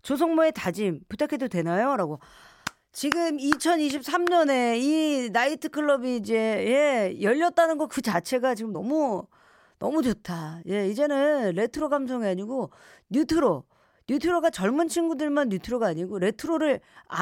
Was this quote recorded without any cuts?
yes; 0 cuts

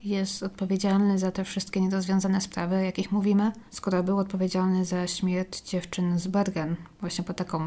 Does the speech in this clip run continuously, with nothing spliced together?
no; 1 cut; at 3.7 s

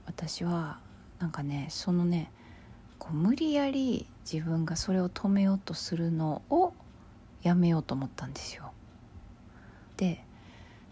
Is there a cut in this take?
yes; 1 cut; at 10.0 s

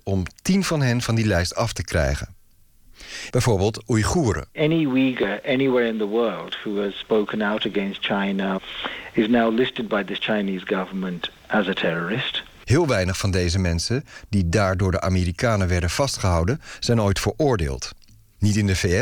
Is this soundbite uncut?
no; 3 cuts; at 3.3 s, 4.5 s, 12.6 s

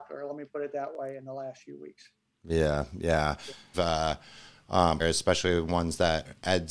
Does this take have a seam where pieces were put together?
yes; 2 cuts; at 3.7 s, 5.0 s

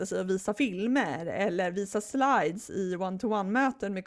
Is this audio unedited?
yes; 0 cuts

